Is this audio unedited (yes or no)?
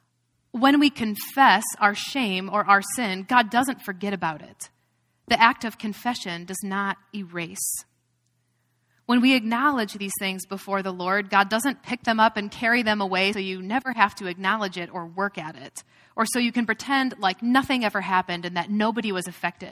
no